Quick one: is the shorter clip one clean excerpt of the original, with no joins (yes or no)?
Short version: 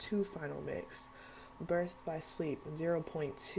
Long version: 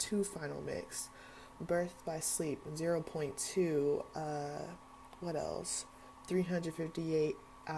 yes